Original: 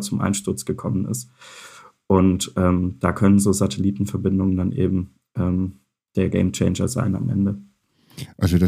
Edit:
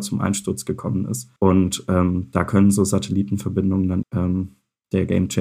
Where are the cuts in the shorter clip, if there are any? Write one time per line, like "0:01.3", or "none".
0:01.4
0:04.0